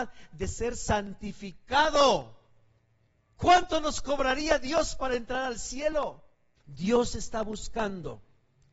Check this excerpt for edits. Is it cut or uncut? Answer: cut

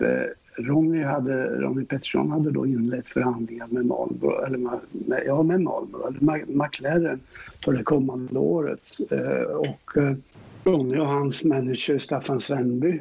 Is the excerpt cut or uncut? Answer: uncut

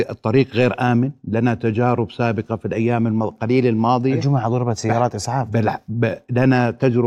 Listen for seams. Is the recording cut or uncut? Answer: uncut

